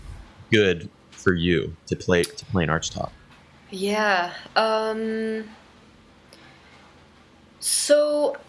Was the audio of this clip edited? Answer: no; 0 cuts

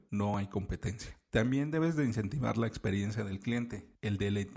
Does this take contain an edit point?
no; 0 cuts

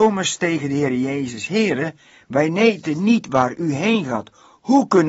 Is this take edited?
no; 0 cuts

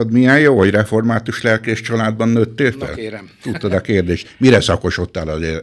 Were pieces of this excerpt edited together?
no; 0 cuts

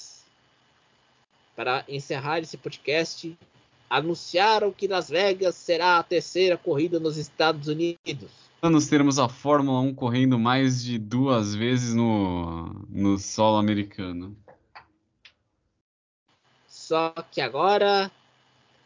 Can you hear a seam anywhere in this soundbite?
yes; 1 cut; at 8.6 s

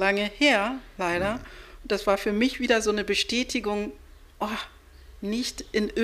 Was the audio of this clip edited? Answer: no; 0 cuts

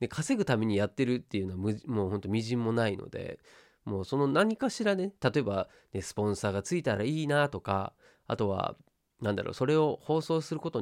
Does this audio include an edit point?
no; 0 cuts

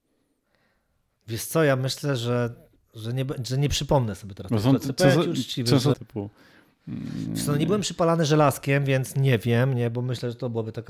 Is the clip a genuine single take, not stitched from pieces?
no; 1 cut; at 5.9 s

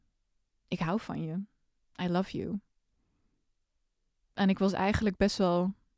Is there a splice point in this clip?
no; 0 cuts

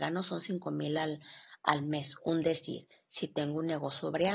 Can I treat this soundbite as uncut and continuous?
yes; 0 cuts

